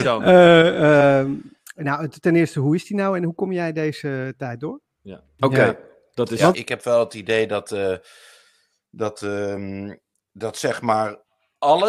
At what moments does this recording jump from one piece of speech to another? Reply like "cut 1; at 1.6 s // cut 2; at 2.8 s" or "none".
cut 1; at 5.4 s // cut 2; at 6.5 s

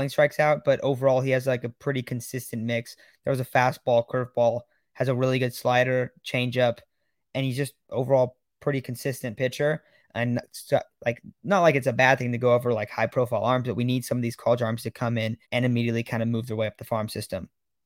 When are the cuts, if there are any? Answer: cut 1; at 10.0 s // cut 2; at 15.4 s

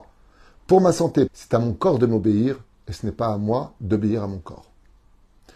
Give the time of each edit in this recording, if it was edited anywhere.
cut 1; at 1.3 s

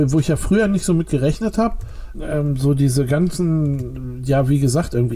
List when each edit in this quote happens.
cut 1; at 2.1 s

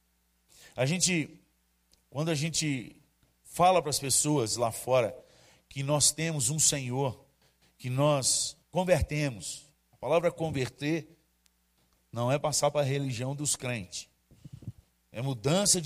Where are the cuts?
none

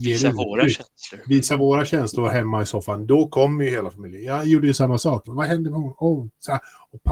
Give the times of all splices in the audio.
cut 1; at 5.2 s

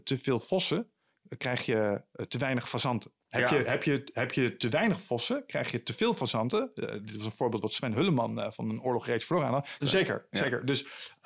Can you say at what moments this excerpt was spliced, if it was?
cut 1; at 3.2 s // cut 2; at 9.8 s

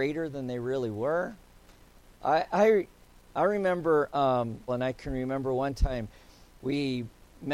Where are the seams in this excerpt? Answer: cut 1; at 4.7 s

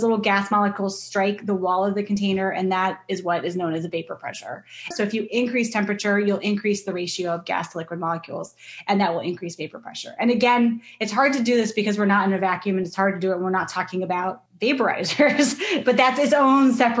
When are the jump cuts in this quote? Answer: cut 1; at 4.9 s // cut 2; at 14.5 s

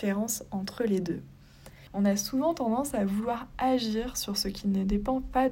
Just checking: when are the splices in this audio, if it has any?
cut 1; at 1.9 s

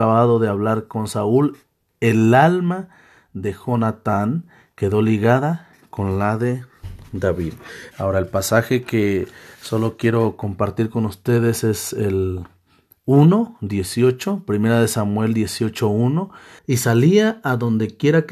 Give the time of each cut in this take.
cut 1; at 7.9 s // cut 2; at 16.6 s

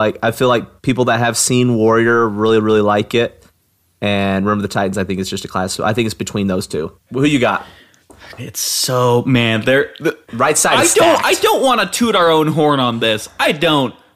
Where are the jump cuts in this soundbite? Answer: cut 1; at 7.1 s // cut 2; at 8.4 s // cut 3; at 10.2 s

